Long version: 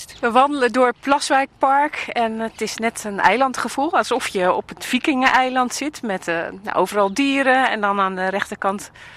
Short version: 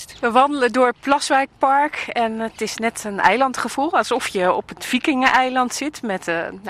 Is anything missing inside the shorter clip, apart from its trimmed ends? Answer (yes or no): no